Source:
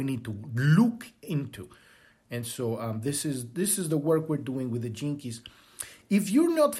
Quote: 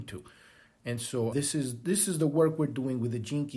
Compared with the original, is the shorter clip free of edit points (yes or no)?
no